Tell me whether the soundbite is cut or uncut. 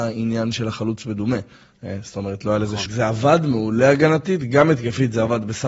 cut